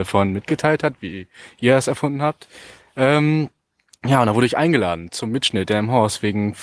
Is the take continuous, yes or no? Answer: yes